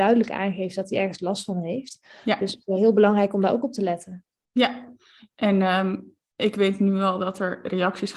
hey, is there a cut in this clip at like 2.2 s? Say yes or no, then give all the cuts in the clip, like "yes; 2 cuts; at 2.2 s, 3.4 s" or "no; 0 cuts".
no; 0 cuts